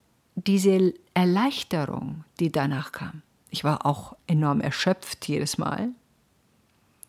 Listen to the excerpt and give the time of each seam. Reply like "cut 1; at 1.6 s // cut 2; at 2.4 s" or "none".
none